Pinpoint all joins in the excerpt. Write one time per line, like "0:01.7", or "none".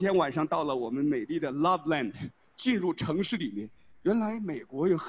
none